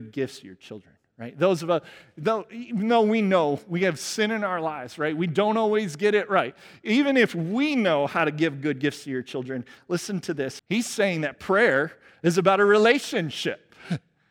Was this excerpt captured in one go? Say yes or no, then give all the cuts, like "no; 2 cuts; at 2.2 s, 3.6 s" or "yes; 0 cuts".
no; 1 cut; at 10.6 s